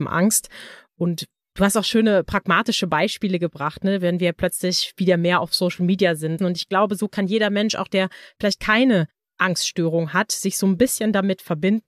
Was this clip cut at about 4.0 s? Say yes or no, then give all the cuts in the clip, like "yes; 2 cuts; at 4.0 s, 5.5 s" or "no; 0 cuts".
no; 1 cut; at 6.4 s